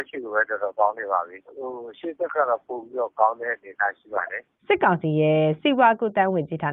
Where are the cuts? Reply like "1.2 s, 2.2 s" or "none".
1.4 s, 4.6 s